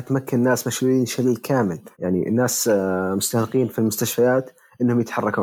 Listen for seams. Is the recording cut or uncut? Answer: cut